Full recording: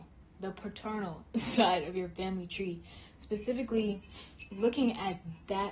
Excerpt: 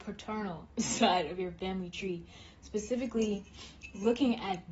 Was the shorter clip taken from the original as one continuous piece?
yes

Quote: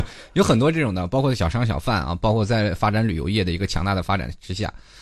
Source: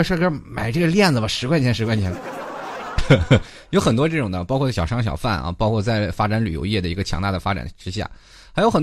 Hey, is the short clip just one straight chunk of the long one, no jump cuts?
yes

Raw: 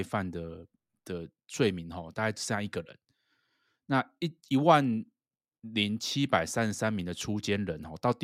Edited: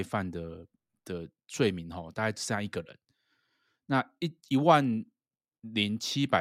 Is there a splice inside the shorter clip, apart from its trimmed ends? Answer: no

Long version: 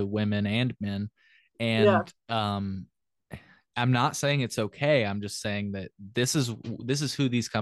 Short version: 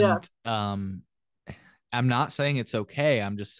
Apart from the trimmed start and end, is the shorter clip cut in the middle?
no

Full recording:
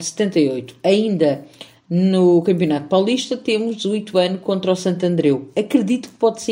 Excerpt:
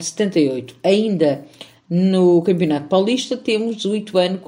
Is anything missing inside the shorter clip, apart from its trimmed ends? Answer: no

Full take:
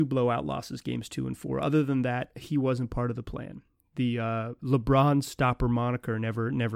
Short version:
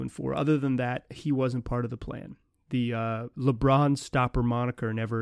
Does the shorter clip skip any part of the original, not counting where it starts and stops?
no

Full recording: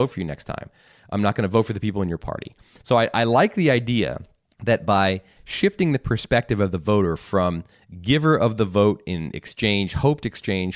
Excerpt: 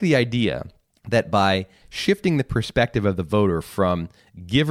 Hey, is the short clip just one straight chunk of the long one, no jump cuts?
yes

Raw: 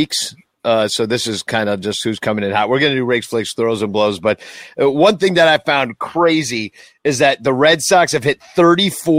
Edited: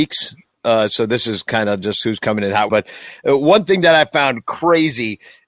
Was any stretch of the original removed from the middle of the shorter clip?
yes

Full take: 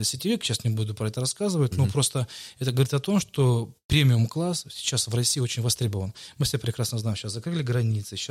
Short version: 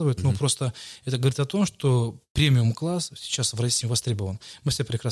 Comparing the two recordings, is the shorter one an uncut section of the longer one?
no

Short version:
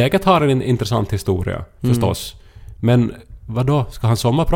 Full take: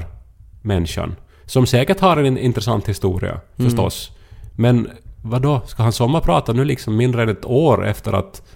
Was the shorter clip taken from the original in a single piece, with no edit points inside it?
yes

